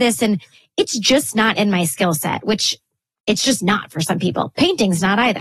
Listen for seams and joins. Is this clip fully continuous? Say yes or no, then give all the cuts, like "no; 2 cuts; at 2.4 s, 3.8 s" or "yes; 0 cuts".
yes; 0 cuts